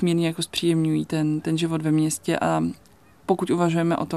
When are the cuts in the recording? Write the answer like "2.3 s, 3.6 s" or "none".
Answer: none